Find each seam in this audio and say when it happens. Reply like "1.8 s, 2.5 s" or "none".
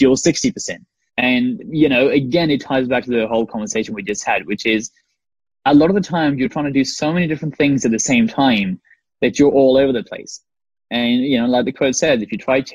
1.1 s